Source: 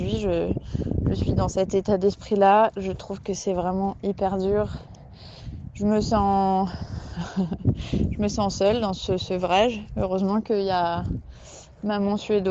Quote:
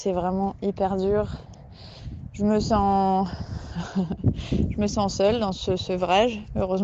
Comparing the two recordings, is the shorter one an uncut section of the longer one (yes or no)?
yes